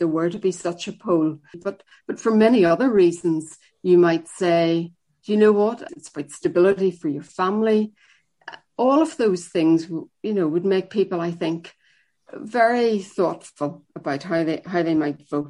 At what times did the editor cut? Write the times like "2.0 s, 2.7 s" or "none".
1.5 s, 5.9 s